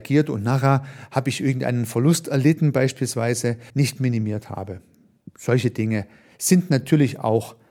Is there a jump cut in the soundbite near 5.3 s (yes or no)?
no